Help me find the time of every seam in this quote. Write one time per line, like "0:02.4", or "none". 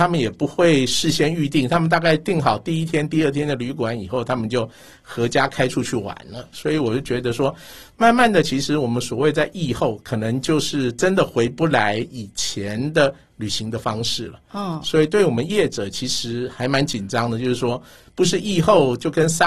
none